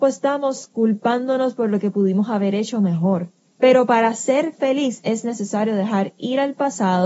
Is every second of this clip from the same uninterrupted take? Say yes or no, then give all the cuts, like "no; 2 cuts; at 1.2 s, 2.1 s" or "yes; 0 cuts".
no; 1 cut; at 3.5 s